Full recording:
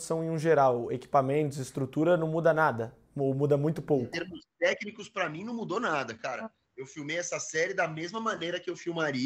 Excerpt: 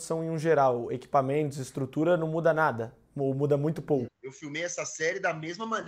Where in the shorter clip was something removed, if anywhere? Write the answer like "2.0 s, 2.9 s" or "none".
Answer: 4.1 s